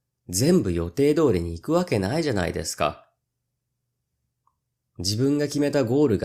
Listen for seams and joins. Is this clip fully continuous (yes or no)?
yes